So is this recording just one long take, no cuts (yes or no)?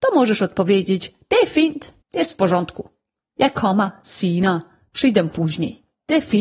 no